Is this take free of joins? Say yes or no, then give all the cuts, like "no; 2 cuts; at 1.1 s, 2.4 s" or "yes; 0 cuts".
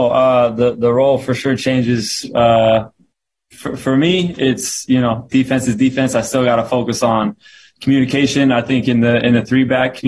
yes; 0 cuts